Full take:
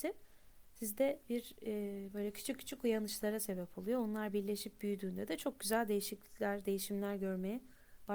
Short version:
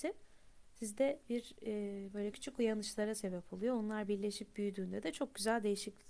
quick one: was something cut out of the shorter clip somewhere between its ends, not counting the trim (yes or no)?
yes